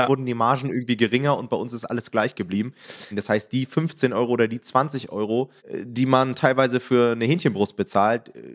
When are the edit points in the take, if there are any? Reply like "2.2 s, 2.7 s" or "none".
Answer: 3.1 s, 5.6 s